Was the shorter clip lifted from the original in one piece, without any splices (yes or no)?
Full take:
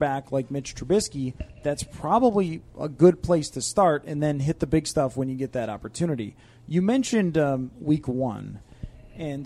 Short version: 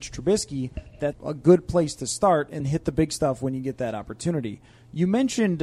no